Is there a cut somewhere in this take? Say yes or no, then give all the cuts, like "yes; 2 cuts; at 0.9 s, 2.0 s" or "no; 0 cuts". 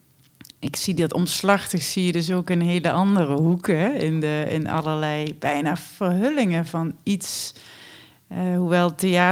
no; 0 cuts